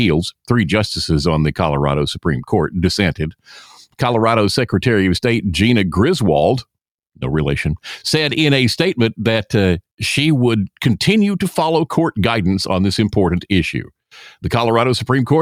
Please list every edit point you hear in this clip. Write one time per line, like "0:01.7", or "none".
none